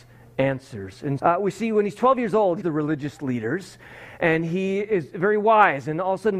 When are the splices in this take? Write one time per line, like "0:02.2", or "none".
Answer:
0:01.2
0:02.6